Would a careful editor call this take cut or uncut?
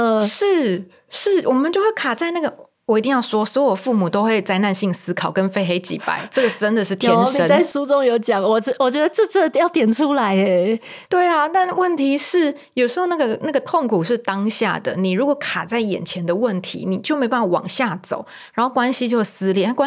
uncut